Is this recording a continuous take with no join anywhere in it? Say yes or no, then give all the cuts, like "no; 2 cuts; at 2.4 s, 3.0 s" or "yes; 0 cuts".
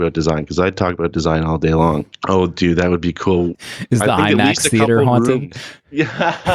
no; 2 cuts; at 2.1 s, 3.5 s